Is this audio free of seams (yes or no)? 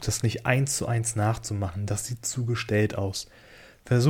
yes